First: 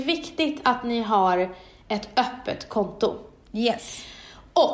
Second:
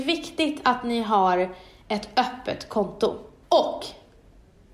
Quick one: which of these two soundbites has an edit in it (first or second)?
second